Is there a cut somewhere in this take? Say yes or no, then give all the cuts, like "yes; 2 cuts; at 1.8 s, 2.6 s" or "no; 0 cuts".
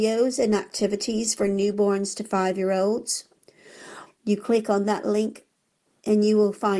yes; 1 cut; at 4.1 s